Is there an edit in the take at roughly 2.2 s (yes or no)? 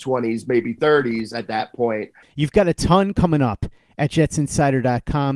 yes